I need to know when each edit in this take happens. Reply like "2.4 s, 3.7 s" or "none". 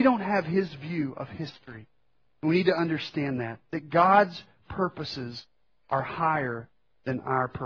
none